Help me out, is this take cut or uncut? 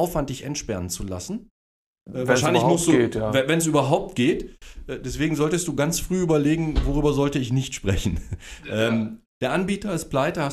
cut